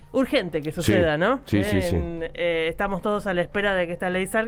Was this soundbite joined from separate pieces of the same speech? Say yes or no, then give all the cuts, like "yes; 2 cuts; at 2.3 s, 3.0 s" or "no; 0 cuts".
no; 0 cuts